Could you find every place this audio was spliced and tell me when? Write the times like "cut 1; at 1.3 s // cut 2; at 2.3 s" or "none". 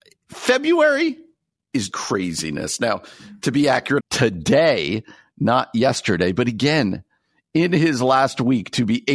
cut 1; at 1.9 s // cut 2; at 4.0 s